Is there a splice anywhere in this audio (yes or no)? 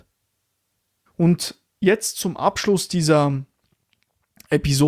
yes